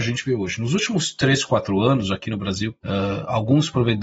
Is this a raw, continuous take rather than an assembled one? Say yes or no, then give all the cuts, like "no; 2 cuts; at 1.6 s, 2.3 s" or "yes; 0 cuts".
no; 1 cut; at 2.8 s